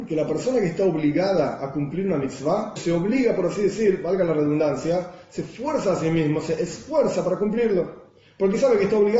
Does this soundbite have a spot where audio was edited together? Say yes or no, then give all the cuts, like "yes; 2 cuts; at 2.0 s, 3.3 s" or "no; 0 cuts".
yes; 1 cut; at 2.8 s